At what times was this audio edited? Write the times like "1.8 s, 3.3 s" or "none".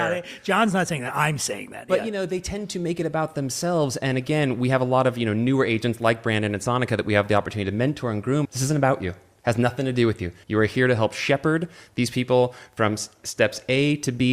8.4 s, 10.4 s